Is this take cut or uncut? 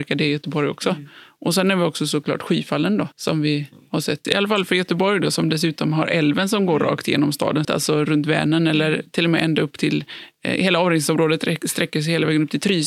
cut